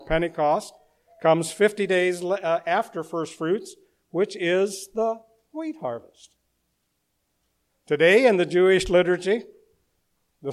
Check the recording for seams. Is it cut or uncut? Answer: uncut